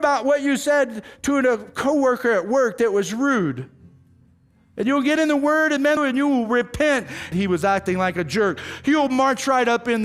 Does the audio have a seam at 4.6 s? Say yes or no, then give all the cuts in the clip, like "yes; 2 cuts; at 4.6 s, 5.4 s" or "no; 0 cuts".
no; 2 cuts; at 6.0 s, 7.3 s